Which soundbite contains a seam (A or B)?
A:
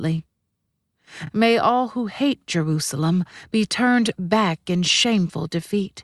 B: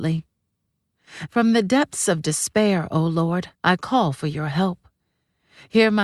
B